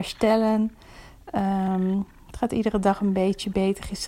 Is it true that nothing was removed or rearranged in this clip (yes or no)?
yes